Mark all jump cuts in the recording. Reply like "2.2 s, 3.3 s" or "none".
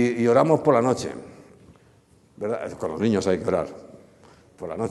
none

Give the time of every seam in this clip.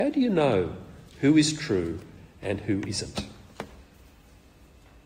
none

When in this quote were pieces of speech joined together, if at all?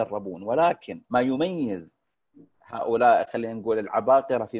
1.0 s

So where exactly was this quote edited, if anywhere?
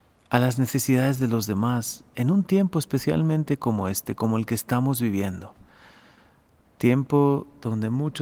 none

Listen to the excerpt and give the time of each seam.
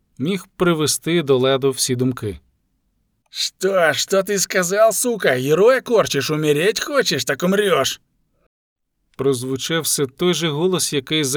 3.2 s

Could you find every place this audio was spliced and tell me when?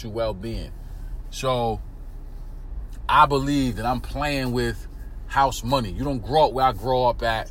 1.2 s

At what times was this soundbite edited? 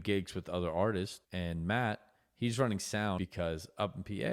1.2 s, 3.2 s

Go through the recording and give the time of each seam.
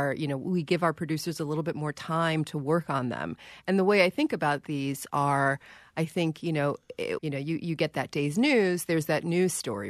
7.2 s

